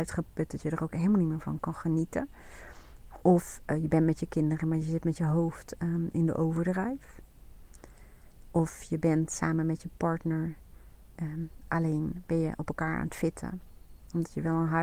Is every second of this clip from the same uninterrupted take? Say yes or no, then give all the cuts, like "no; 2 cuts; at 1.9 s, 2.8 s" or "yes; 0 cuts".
yes; 0 cuts